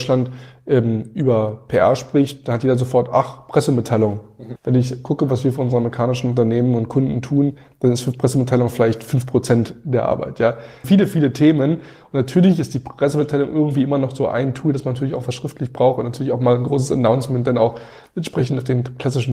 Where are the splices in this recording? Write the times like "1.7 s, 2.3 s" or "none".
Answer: 4.6 s, 10.8 s

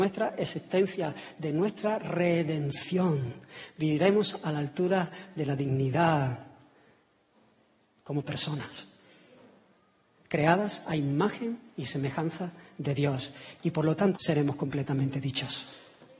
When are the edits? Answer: 14.2 s

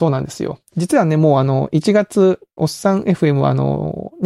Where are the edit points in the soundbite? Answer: 2.6 s

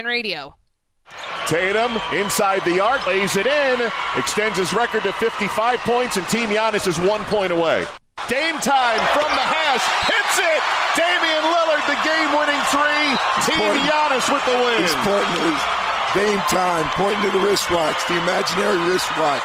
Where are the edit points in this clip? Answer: 3.1 s, 8.2 s

